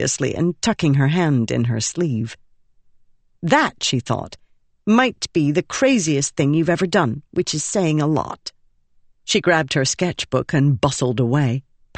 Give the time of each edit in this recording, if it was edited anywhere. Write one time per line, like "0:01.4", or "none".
none